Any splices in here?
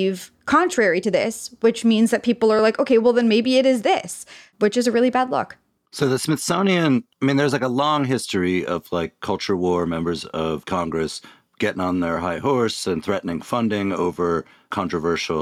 no; 0 cuts

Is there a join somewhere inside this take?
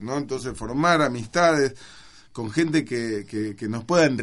no; 0 cuts

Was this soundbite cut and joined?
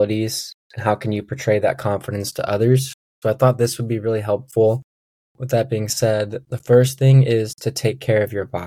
yes; 2 cuts; at 3.2 s, 5.3 s

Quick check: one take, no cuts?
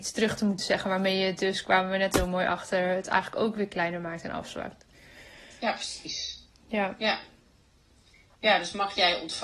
yes; 0 cuts

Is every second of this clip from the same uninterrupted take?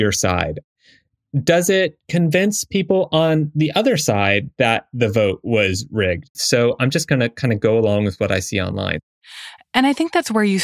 no; 1 cut; at 6.3 s

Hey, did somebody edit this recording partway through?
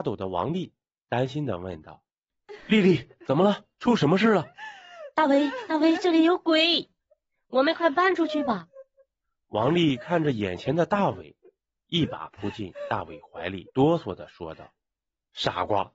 no; 0 cuts

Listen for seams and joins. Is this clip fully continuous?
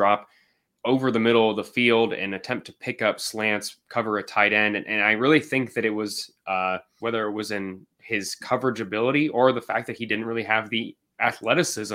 no; 1 cut; at 7.0 s

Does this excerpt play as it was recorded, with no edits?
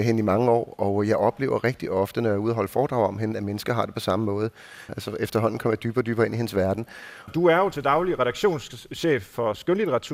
no; 2 cuts; at 4.9 s, 7.3 s

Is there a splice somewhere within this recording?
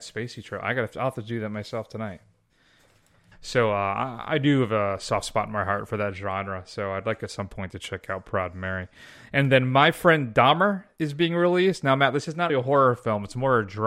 yes; 2 cuts; at 3.3 s, 12.5 s

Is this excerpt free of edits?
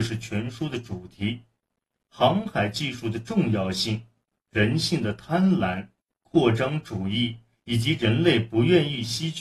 yes; 0 cuts

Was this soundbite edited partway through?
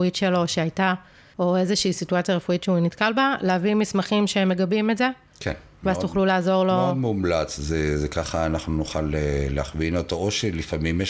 no; 0 cuts

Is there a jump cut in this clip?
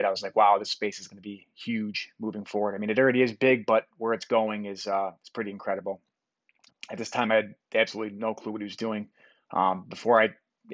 yes; 1 cut; at 6.7 s

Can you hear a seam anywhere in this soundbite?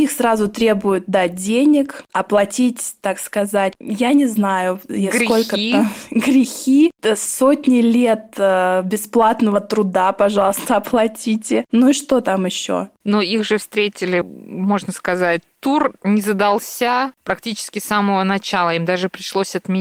yes; 2 cuts; at 3.7 s, 14.2 s

